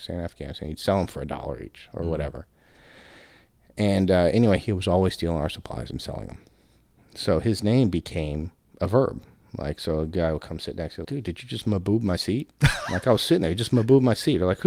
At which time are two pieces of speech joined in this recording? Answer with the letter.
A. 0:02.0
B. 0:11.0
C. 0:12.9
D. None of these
B